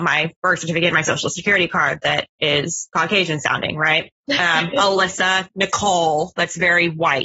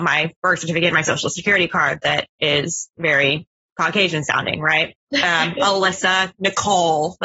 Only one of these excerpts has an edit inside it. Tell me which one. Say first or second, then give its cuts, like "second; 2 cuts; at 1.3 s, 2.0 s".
first; 1 cut; at 2.9 s